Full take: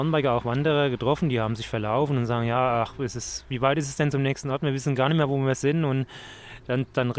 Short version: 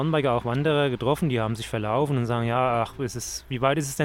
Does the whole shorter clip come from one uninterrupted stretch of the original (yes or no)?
yes